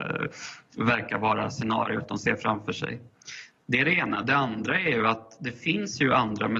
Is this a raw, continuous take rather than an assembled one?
yes; 0 cuts

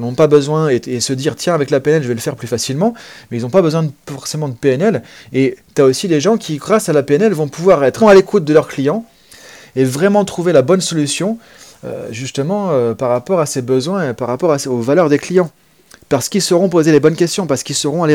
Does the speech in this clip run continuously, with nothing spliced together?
no; 1 cut; at 8.0 s

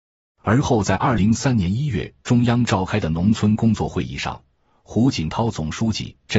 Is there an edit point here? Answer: yes; 1 cut; at 1.2 s

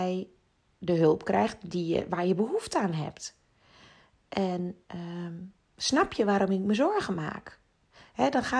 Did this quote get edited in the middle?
no; 0 cuts

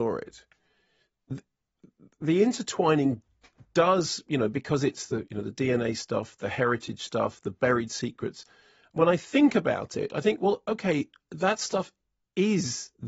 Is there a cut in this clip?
no; 0 cuts

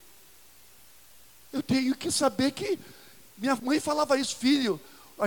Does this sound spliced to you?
no; 0 cuts

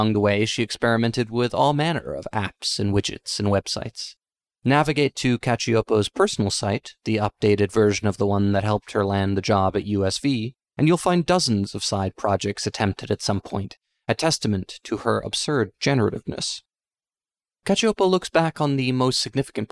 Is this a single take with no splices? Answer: yes; 0 cuts

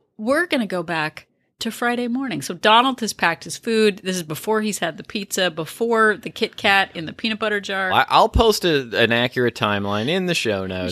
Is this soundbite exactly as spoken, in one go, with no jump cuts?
no; 1 cut; at 7.9 s

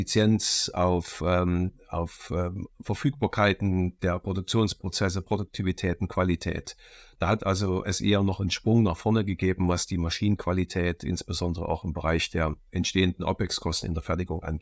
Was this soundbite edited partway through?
no; 0 cuts

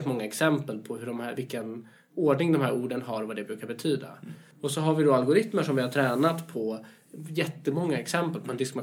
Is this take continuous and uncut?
no; 1 cut; at 4.5 s

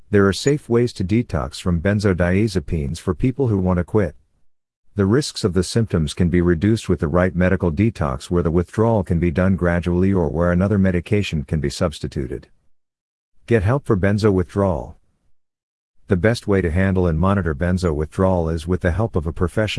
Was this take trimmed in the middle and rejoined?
yes; 1 cut; at 3.6 s

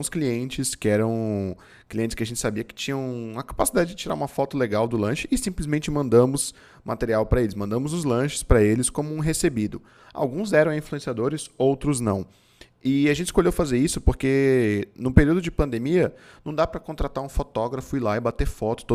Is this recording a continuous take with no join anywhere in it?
yes; 0 cuts

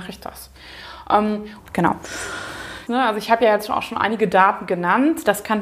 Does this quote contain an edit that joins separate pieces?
yes; 2 cuts; at 1.6 s, 2.9 s

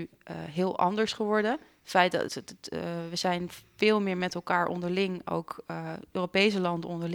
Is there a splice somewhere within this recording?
yes; 1 cut; at 2.3 s

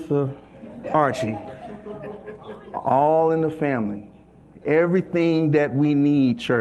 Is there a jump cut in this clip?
no; 0 cuts

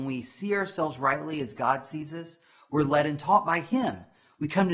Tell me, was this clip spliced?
no; 0 cuts

